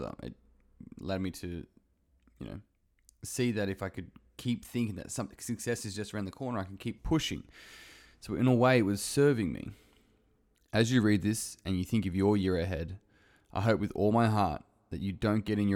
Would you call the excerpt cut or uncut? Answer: cut